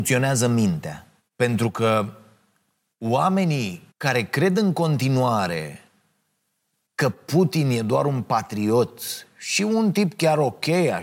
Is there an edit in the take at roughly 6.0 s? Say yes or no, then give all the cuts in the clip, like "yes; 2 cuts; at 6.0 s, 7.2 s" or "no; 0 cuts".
no; 2 cuts; at 1.2 s, 3.9 s